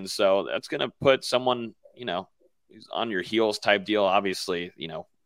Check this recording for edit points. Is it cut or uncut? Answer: uncut